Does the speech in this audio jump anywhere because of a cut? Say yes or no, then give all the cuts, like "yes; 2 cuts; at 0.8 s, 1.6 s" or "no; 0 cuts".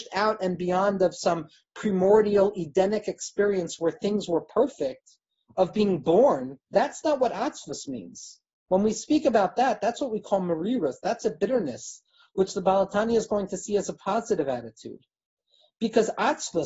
yes; 1 cut; at 6.7 s